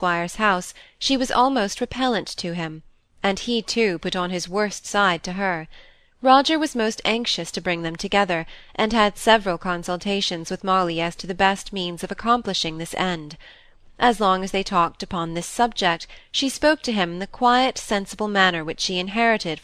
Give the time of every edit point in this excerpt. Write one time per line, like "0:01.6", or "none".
none